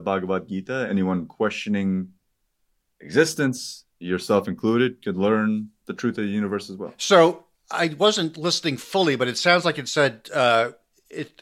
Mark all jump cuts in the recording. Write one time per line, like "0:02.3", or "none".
none